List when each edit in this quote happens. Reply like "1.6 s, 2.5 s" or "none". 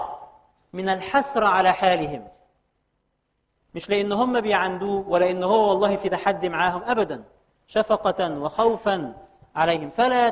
none